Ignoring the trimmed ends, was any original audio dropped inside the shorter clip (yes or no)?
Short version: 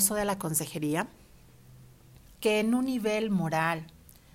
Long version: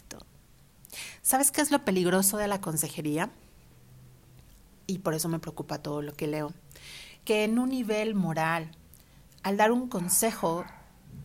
yes